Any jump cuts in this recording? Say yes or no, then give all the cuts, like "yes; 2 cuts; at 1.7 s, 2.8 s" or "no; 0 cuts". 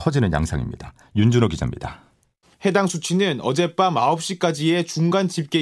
yes; 1 cut; at 2.4 s